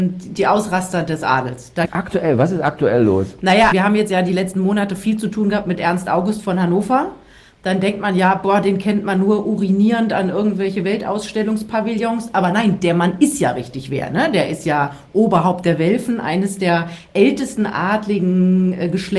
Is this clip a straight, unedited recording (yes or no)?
no